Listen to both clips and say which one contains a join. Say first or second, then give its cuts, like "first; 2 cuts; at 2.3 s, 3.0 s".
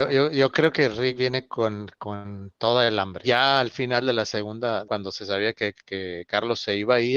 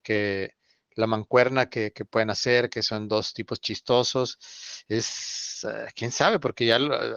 first; 2 cuts; at 3.2 s, 4.8 s